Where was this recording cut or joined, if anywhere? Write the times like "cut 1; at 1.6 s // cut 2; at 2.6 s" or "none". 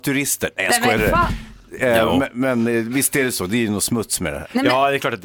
cut 1; at 1.0 s